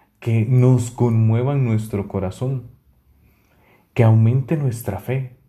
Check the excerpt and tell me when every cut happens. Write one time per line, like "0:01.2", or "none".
none

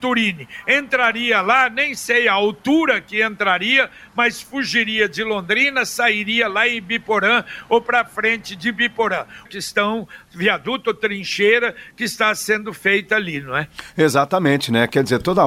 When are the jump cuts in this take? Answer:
0:09.5

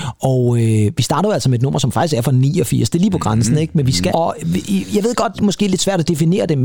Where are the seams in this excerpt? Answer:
0:04.1
0:05.3

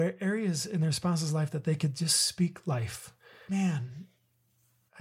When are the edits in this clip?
0:03.5

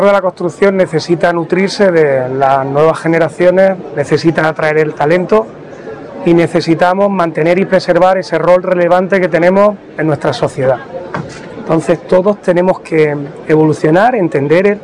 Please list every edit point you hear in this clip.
0:11.5

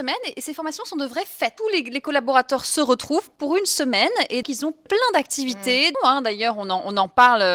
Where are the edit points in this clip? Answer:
0:01.6
0:04.4
0:05.9

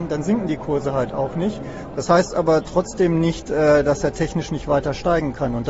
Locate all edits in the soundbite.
0:01.9

